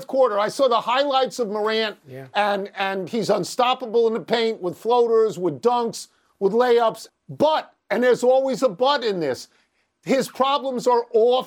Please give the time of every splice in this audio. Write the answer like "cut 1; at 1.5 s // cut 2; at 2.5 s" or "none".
cut 1; at 7.1 s